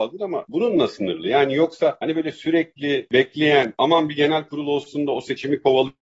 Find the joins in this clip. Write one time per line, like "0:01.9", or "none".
0:03.8